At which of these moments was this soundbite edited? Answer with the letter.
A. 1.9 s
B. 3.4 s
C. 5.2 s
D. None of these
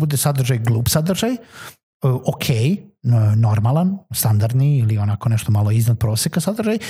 D